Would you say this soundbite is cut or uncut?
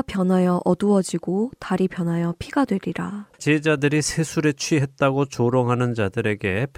cut